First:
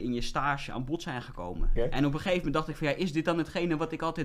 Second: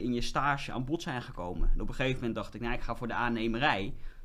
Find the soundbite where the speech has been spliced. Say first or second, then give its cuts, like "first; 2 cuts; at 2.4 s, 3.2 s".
first; 1 cut; at 1.8 s